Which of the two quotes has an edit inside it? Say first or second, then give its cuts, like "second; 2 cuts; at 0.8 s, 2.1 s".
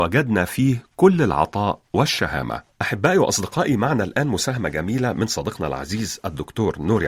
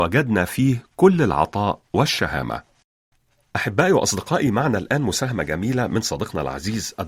first; 1 cut; at 2.7 s